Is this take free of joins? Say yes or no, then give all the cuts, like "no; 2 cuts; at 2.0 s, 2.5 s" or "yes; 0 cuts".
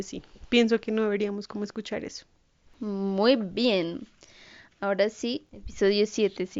yes; 0 cuts